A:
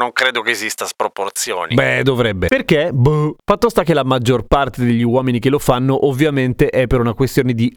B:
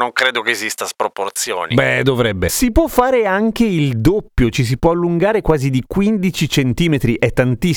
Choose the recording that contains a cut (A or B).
A